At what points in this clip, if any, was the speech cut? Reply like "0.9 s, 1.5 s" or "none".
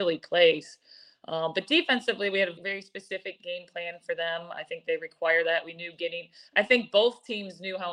2.6 s

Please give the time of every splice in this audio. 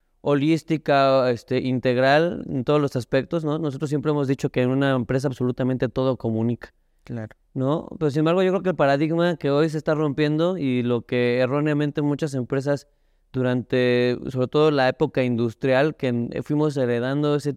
none

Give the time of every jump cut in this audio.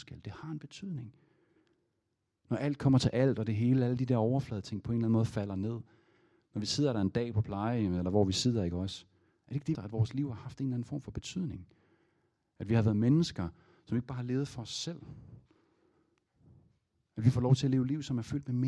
2.4 s, 9.7 s

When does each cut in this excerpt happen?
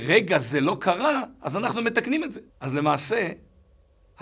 2.5 s

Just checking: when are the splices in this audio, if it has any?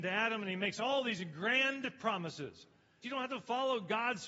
3.0 s

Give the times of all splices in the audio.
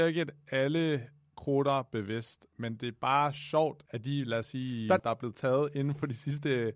3.9 s, 5.0 s

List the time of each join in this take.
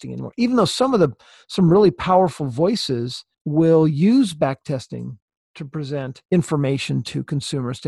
3.3 s, 6.2 s

